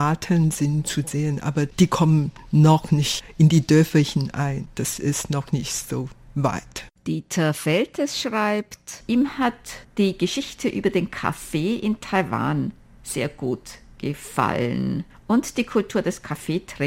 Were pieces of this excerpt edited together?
no; 0 cuts

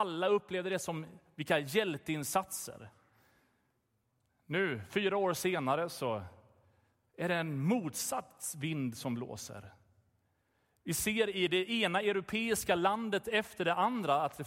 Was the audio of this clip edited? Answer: no; 0 cuts

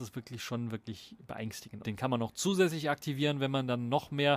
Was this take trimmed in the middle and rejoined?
yes; 1 cut; at 1.8 s

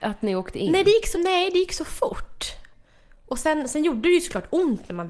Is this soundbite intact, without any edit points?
no; 1 cut; at 1.1 s

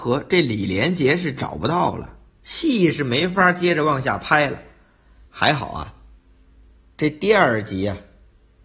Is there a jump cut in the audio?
yes; 1 cut; at 5.3 s

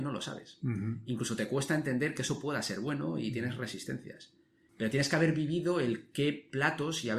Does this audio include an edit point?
yes; 1 cut; at 4.7 s

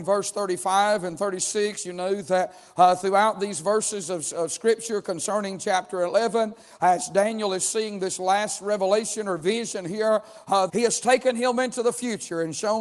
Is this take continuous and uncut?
no; 1 cut; at 10.7 s

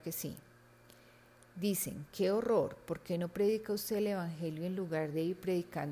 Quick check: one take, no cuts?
yes; 0 cuts

